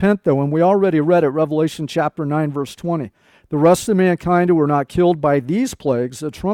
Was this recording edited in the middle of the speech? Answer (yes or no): no